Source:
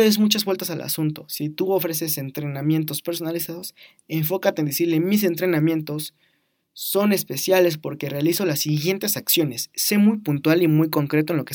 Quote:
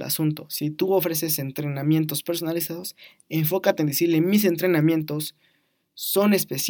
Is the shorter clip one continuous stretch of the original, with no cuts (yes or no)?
yes